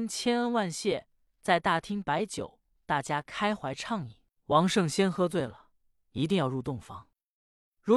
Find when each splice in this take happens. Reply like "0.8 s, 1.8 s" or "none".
4.3 s

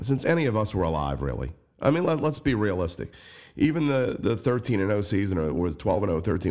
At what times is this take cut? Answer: none

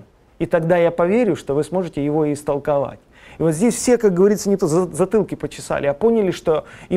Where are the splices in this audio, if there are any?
4.6 s

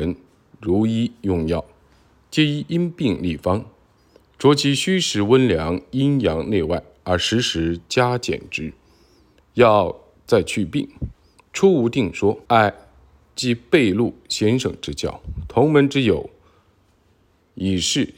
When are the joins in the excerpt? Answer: 12.5 s

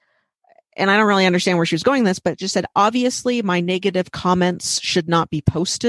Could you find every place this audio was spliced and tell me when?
none

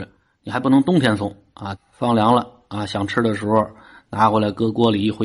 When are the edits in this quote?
1.7 s

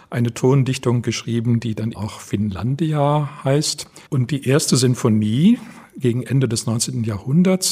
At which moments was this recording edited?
1.9 s, 4.1 s

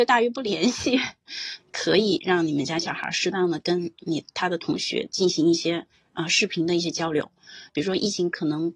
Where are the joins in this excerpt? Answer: 1.6 s, 7.7 s

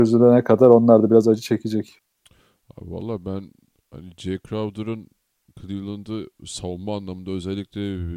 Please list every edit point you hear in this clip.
none

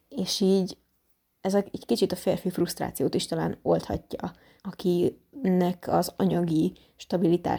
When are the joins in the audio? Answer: 4.6 s

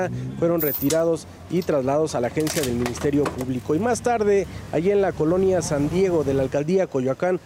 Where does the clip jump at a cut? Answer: none

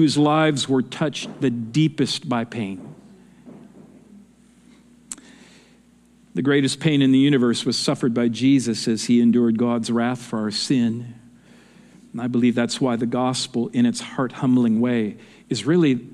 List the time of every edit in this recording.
none

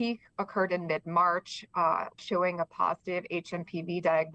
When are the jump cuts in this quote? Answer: 2.2 s

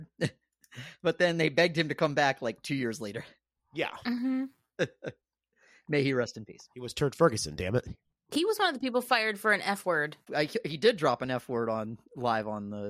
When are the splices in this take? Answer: 10.3 s

